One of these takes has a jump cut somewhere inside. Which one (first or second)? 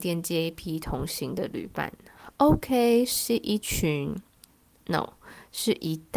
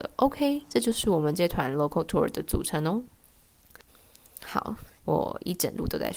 second